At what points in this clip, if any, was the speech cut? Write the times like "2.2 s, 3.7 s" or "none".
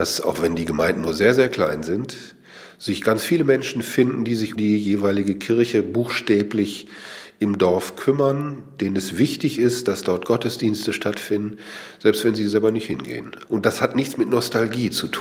4.6 s, 13.4 s